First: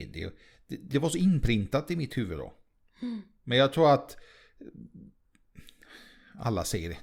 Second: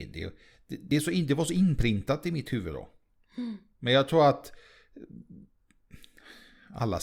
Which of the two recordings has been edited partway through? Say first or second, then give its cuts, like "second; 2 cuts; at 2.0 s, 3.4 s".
first; 1 cut; at 0.9 s